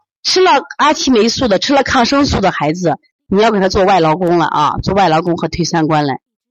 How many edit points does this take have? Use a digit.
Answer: 0